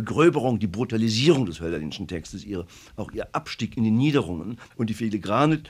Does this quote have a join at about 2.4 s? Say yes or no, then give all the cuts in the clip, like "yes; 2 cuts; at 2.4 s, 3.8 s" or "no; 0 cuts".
no; 1 cut; at 4.7 s